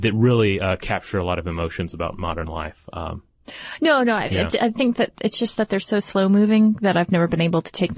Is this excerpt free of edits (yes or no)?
yes